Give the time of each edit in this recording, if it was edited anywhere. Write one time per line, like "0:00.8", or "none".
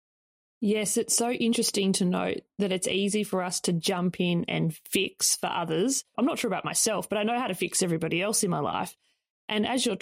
0:06.1